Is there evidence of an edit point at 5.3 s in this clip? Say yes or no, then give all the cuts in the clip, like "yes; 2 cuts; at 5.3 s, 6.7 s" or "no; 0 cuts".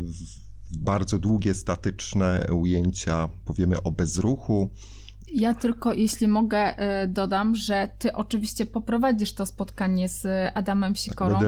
yes; 1 cut; at 5.3 s